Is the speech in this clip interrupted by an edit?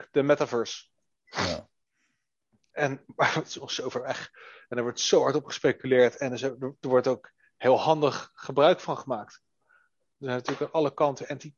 yes; 1 cut; at 2.7 s

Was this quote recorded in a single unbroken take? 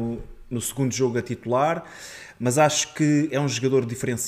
yes; 0 cuts

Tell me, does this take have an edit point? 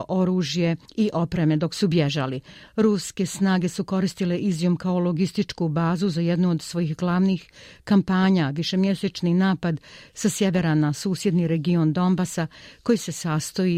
no; 0 cuts

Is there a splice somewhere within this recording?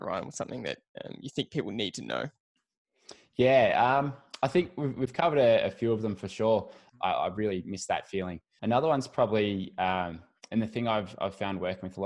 yes; 2 cuts; at 6.9 s, 8.6 s

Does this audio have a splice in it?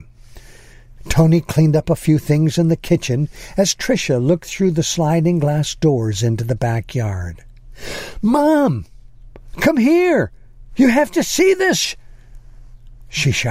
no; 0 cuts

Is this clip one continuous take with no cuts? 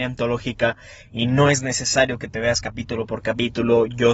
yes; 0 cuts

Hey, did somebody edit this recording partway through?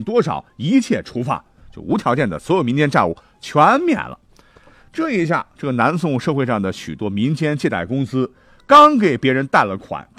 no; 0 cuts

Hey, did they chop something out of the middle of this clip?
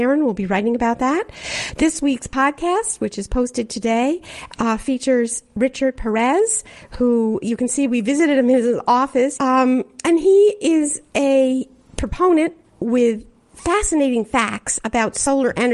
yes; 2 cuts; at 1.8 s, 9.4 s

